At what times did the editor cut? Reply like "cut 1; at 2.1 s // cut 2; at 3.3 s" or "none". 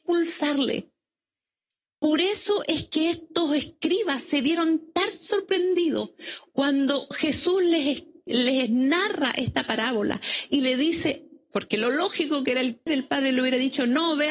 cut 1; at 12.9 s